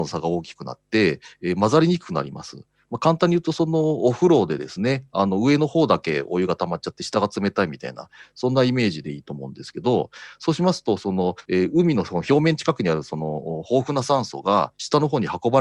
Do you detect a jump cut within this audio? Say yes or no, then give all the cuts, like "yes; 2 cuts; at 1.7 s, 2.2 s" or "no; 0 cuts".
no; 0 cuts